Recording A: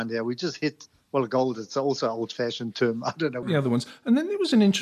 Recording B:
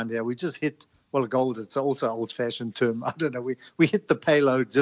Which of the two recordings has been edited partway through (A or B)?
A